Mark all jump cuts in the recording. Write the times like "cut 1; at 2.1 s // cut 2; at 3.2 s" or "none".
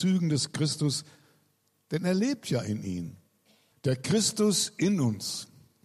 cut 1; at 3.7 s